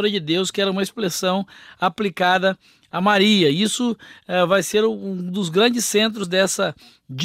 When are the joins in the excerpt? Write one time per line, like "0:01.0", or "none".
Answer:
none